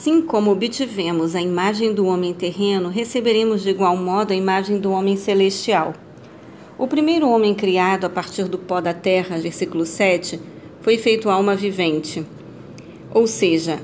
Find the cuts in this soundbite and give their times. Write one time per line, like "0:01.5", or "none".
0:09.4